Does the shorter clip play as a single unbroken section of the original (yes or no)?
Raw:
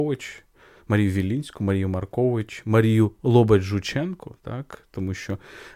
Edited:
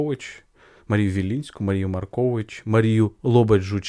yes